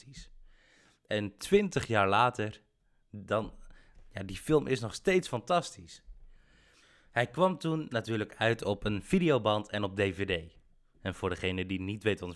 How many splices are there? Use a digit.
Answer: 0